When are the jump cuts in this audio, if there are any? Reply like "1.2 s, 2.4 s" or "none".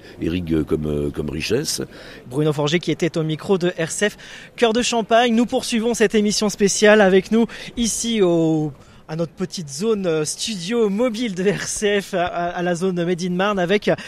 2.2 s